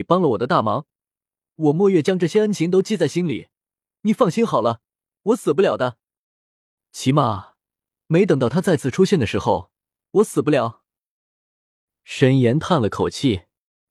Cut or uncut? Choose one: cut